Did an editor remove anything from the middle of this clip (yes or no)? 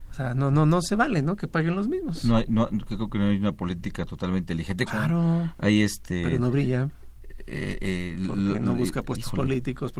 yes